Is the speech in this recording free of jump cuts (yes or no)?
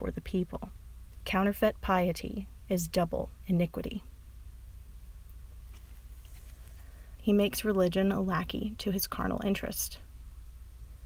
no